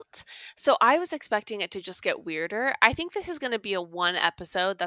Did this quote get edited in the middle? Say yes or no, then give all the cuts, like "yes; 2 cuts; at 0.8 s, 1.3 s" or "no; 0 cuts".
no; 0 cuts